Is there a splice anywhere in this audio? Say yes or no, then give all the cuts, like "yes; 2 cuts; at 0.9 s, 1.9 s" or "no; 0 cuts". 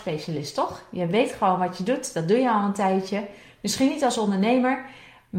no; 0 cuts